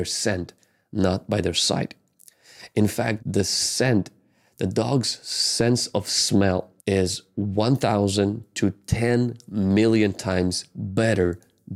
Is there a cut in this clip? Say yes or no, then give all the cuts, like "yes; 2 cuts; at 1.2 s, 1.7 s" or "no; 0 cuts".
yes; 2 cuts; at 3.2 s, 6.8 s